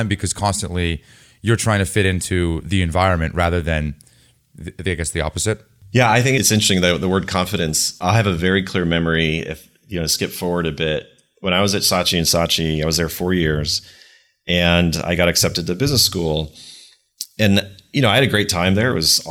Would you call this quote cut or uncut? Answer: uncut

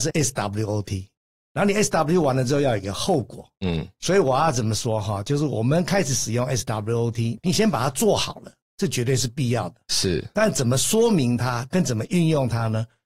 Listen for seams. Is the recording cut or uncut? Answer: cut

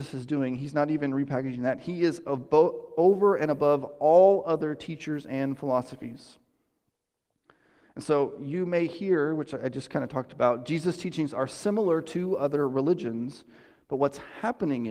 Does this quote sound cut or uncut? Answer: uncut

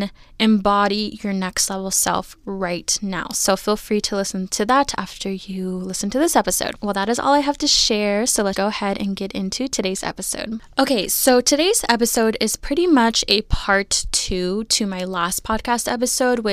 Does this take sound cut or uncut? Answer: cut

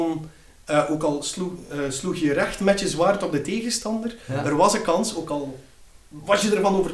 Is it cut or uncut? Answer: uncut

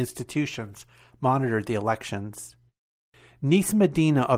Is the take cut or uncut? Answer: uncut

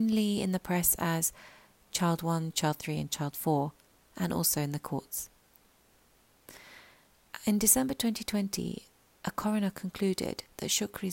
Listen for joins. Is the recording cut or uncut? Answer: cut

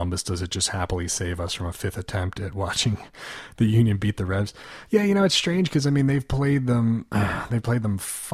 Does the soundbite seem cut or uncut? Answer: uncut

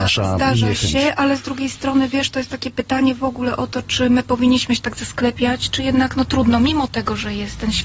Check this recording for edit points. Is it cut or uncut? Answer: uncut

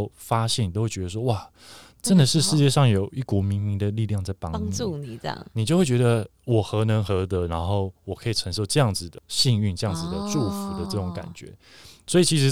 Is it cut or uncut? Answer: cut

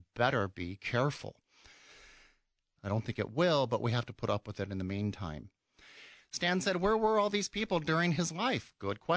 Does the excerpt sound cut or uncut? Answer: cut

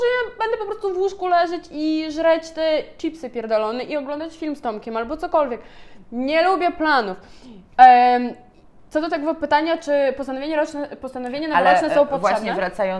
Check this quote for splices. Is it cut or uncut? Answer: uncut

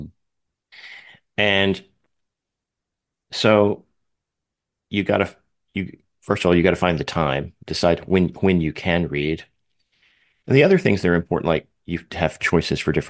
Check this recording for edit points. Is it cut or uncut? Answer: uncut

